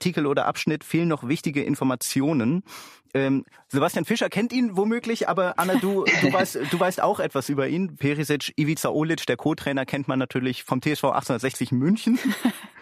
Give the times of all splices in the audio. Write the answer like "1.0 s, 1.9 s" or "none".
8.0 s